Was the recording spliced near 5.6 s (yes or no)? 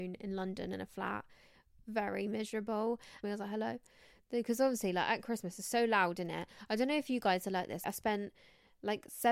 no